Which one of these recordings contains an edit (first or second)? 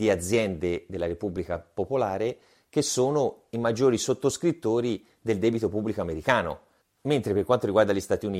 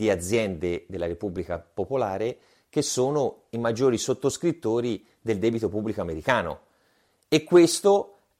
first